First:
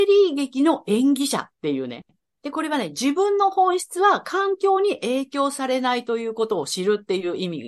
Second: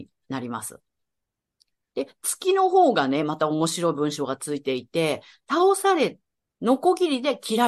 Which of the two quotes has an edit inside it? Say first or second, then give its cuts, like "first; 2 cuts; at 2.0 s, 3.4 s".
first; 1 cut; at 2.4 s